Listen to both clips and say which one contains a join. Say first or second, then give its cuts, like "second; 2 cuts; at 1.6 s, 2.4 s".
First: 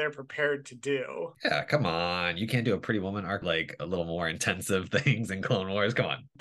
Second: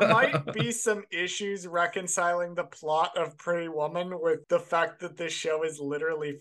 first; 1 cut; at 3.4 s